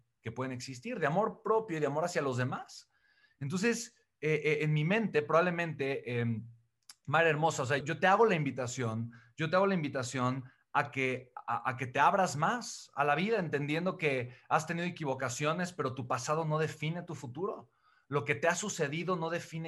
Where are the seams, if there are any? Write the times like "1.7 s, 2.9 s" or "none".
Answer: 7.8 s